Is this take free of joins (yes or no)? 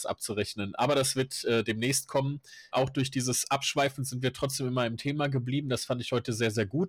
no